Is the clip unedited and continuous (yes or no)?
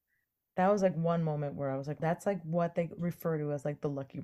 no